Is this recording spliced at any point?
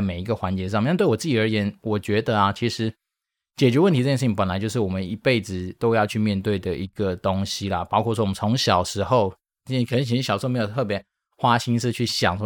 no; 0 cuts

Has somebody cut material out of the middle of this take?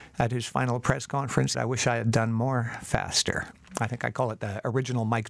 yes; 1 cut; at 1.5 s

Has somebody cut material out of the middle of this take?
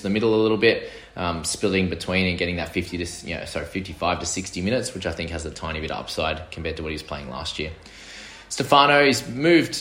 no; 0 cuts

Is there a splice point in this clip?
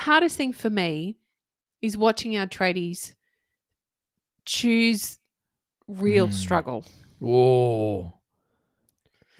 no; 0 cuts

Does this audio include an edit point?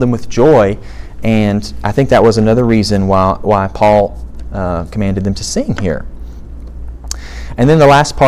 no; 0 cuts

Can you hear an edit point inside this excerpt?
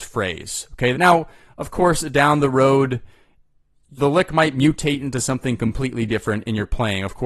yes; 2 cuts; at 0.9 s, 4.0 s

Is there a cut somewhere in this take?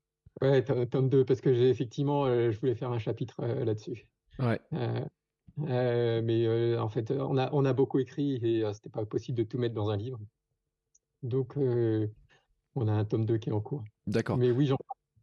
no; 0 cuts

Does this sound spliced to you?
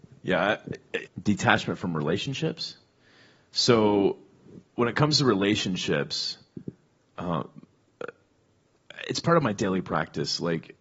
yes; 1 cut; at 1.1 s

